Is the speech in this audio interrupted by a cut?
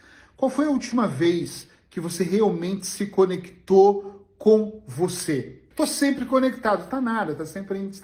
yes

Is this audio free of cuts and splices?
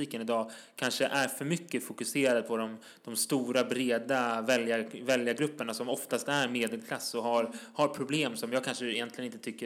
yes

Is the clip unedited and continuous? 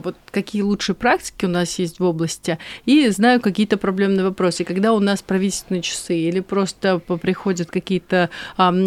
yes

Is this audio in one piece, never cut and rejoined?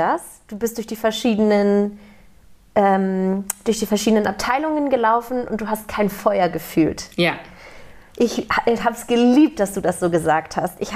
yes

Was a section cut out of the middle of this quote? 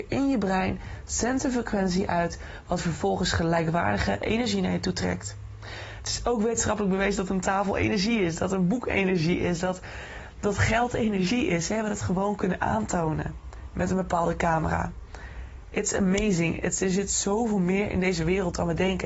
no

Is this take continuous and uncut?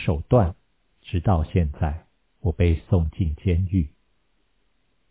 yes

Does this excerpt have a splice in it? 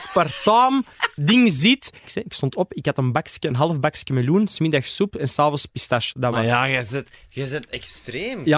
yes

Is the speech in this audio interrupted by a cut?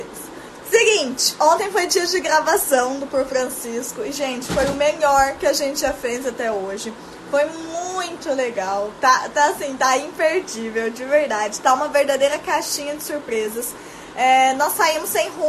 no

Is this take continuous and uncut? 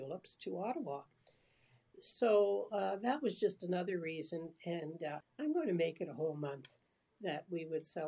no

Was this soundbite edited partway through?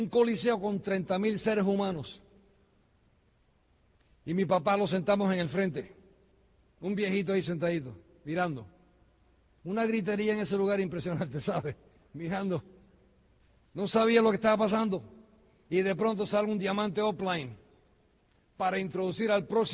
no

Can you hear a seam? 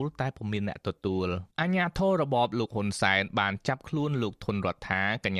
yes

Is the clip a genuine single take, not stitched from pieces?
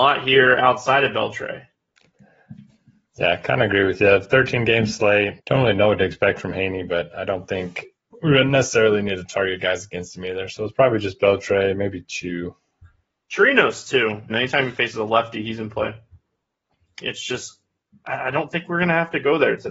no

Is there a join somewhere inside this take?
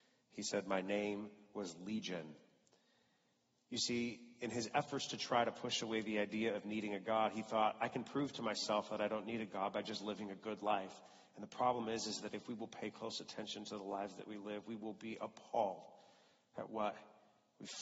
no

